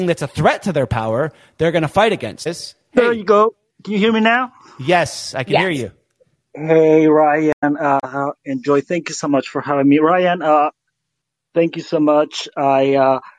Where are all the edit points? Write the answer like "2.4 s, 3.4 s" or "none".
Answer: 2.5 s